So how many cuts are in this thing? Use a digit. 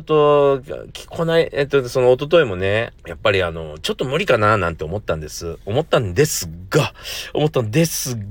1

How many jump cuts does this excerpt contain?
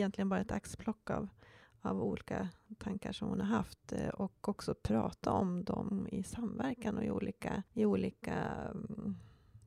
1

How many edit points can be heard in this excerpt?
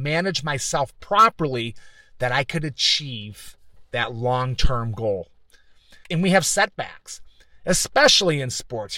1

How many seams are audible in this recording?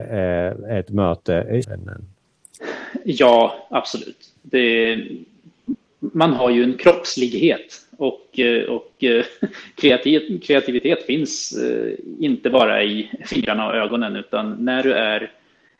1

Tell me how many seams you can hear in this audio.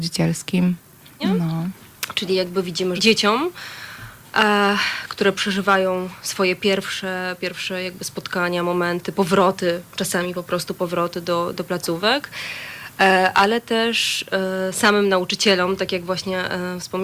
2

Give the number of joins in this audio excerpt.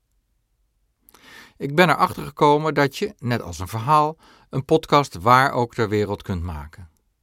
0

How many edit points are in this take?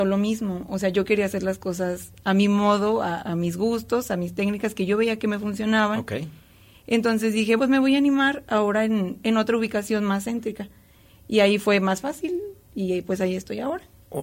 1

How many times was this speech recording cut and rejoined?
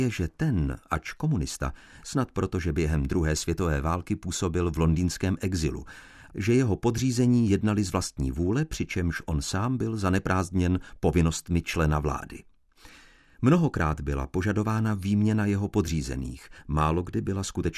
2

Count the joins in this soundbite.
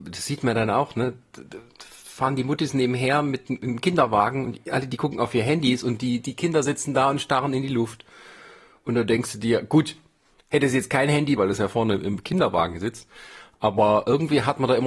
1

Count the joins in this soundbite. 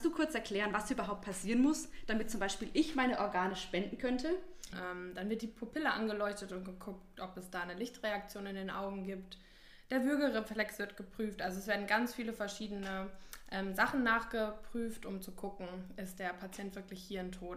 1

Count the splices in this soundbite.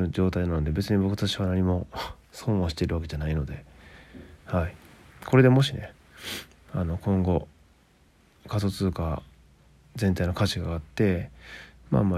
0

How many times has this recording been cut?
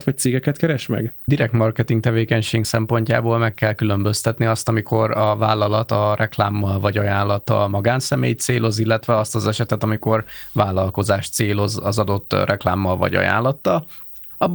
0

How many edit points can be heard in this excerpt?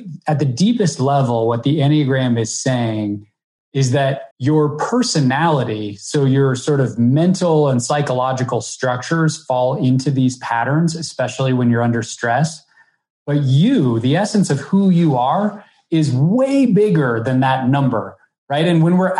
1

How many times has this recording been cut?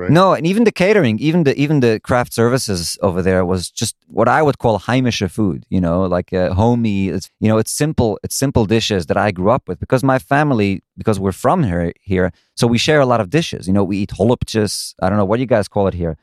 1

